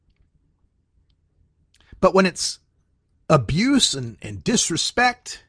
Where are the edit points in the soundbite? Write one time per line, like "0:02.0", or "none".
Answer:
0:04.2